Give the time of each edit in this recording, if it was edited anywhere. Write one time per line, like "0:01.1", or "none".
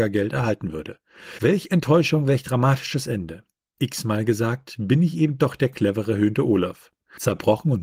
none